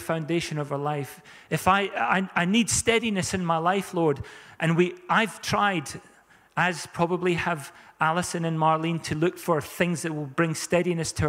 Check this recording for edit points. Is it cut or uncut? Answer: uncut